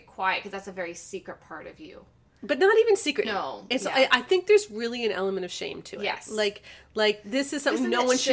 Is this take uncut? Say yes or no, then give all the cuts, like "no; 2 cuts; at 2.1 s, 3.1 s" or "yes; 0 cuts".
no; 1 cut; at 3.2 s